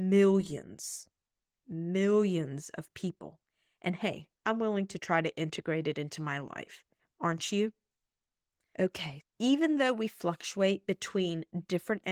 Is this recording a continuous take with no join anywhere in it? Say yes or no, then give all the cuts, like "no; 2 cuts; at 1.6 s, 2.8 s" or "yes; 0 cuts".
no; 2 cuts; at 4.3 s, 9.2 s